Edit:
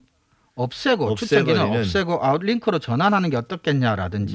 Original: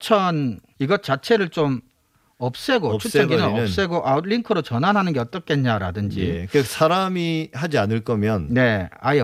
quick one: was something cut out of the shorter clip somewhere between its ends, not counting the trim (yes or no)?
no